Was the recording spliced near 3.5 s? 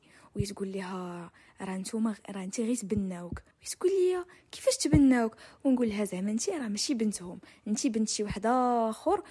yes; 1 cut; at 3.5 s

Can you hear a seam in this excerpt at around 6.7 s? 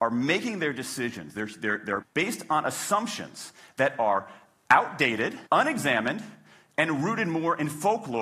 no; 2 cuts; at 2.0 s, 5.5 s

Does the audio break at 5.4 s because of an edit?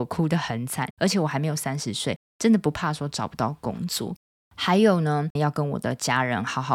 yes; 3 cuts; at 0.9 s, 2.3 s, 5.4 s

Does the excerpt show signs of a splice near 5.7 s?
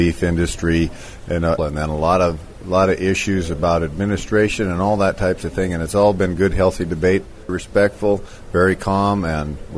no; 2 cuts; at 1.6 s, 7.5 s

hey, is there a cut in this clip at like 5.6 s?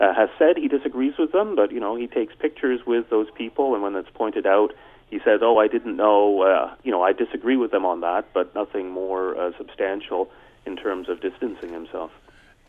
no; 0 cuts

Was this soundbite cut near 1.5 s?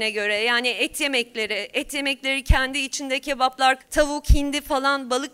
no; 1 cut; at 3.8 s

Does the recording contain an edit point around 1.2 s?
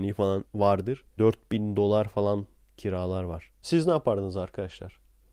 yes; 2 cuts; at 1.2 s, 3.6 s

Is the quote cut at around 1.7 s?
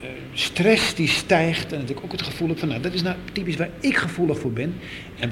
no; 0 cuts

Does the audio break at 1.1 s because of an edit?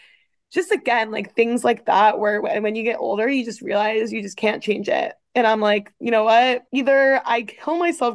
no; 1 cut; at 6.7 s

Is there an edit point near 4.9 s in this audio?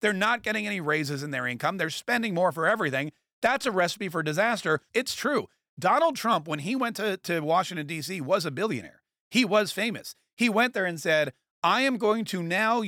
yes; 1 cut; at 4.9 s

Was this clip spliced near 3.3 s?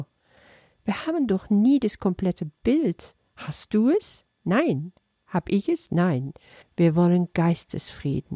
no; 1 cut; at 6.6 s

